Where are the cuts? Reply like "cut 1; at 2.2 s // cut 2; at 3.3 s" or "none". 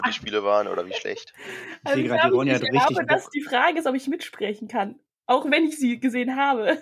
none

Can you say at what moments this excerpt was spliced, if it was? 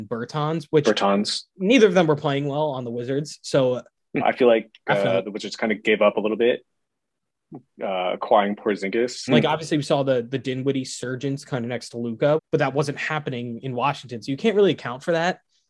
cut 1; at 4.2 s // cut 2; at 9.3 s // cut 3; at 12.4 s

